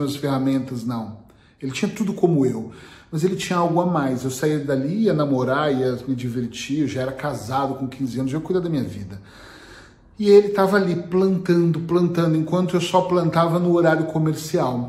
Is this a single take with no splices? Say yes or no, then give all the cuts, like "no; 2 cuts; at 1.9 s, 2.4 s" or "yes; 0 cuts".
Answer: yes; 0 cuts